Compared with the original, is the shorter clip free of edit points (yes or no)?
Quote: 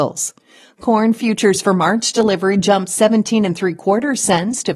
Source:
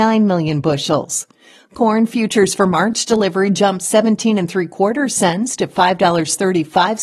yes